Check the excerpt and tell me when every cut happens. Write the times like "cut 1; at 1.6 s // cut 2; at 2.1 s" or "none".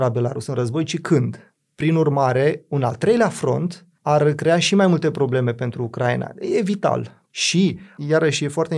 none